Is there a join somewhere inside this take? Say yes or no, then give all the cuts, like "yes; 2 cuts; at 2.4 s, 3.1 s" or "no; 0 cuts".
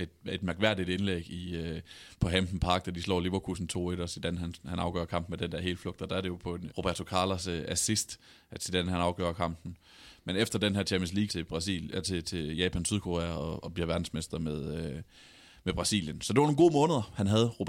yes; 2 cuts; at 6.7 s, 11.3 s